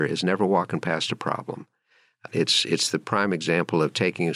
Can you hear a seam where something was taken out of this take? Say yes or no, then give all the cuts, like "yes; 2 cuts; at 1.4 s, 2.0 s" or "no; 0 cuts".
yes; 1 cut; at 2.3 s